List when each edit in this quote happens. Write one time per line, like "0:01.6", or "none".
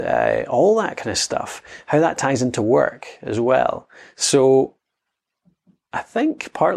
none